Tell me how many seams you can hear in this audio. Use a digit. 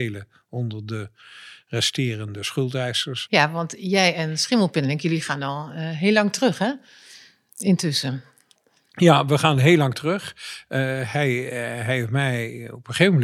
1